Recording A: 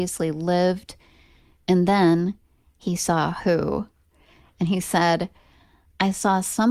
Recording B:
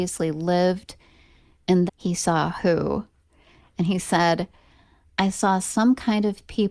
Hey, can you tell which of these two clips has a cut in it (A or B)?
B